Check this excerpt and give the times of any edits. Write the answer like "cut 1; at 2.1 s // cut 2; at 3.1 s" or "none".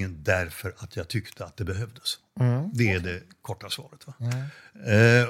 none